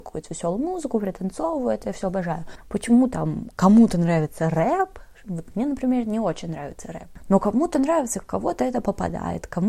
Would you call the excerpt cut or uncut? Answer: uncut